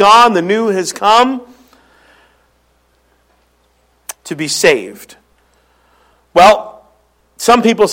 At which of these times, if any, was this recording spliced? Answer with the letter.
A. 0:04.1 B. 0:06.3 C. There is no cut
A